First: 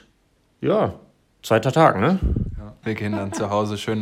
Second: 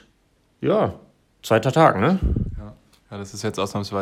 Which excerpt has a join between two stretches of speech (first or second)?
first